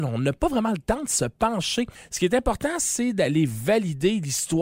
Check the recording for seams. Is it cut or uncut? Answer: uncut